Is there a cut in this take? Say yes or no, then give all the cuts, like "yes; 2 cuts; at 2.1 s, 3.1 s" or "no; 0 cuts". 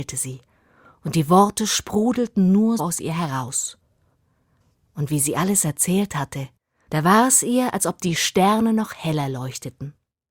yes; 1 cut; at 2.8 s